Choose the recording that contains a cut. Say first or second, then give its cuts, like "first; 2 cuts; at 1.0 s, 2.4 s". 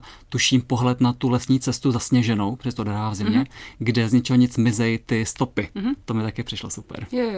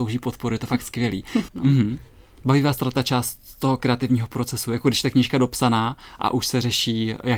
second; 1 cut; at 1.5 s